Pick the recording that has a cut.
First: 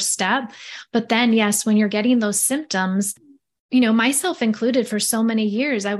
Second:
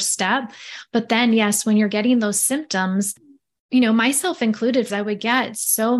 second; 1 cut; at 4.9 s

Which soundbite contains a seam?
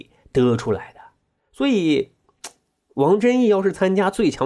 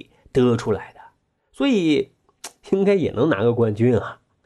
second; 1 cut; at 2.6 s

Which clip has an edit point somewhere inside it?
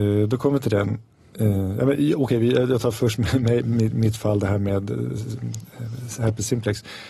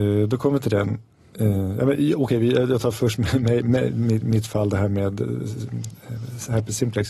first; 1 cut; at 3.6 s

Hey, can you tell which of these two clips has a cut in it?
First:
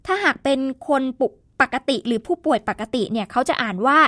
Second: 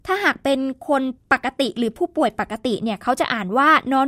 second; 1 cut; at 1.2 s

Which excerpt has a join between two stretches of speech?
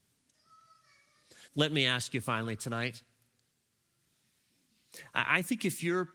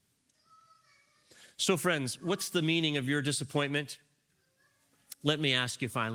first; 1 cut; at 1.5 s

